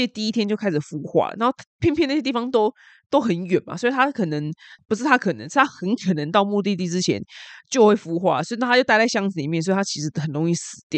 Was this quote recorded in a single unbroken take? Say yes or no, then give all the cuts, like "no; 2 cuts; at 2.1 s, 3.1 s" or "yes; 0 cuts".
yes; 0 cuts